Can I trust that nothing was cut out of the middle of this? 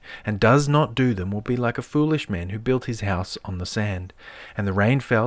yes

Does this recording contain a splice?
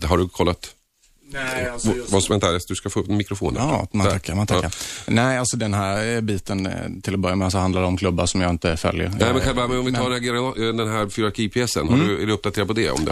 no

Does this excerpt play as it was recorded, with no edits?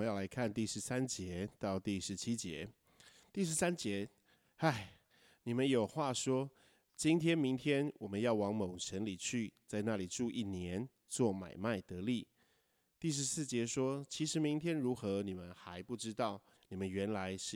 no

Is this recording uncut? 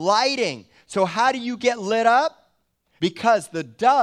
no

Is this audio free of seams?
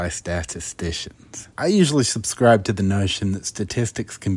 no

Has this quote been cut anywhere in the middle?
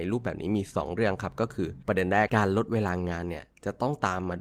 yes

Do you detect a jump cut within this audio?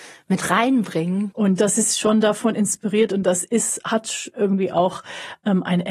yes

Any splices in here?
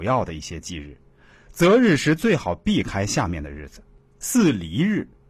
no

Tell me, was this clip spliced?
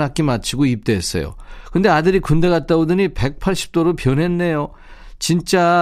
no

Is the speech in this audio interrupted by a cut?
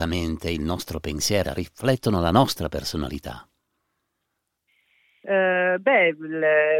yes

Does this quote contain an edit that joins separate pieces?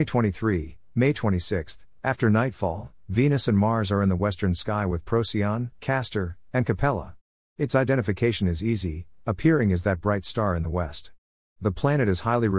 yes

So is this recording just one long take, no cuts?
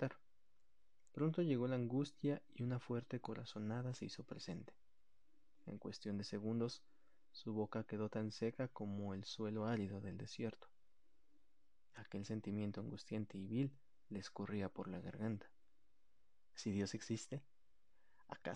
no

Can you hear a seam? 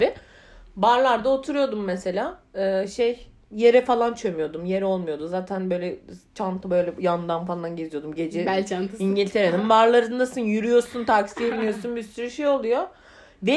no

